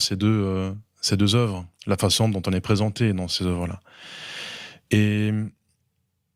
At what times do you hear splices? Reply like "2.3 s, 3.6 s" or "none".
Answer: 1.7 s, 4.8 s